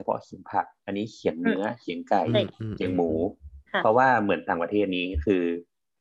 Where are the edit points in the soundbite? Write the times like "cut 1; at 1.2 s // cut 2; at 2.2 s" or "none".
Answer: cut 1; at 3.7 s